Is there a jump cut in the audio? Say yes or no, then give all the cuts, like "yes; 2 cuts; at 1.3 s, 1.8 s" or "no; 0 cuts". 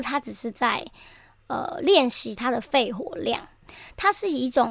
yes; 1 cut; at 3.7 s